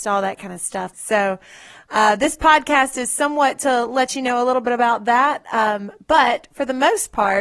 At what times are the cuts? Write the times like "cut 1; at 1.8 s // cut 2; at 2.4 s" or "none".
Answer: cut 1; at 0.9 s